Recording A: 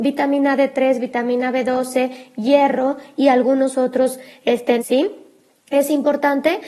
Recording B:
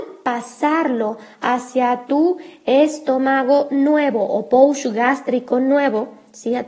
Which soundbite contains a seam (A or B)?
A